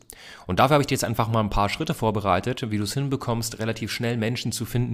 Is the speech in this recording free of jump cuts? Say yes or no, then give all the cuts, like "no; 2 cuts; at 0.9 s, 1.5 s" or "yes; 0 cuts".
yes; 0 cuts